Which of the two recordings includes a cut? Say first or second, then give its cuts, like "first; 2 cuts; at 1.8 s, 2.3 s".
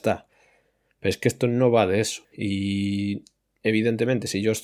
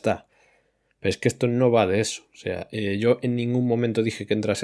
first; 1 cut; at 2.2 s